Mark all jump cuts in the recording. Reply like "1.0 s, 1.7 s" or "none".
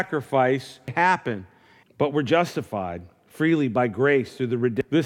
1.8 s